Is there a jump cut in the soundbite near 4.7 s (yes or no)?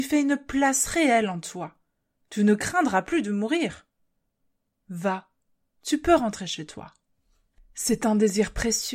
no